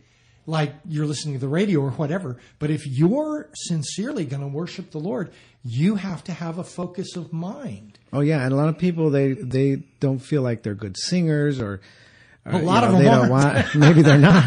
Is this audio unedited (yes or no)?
no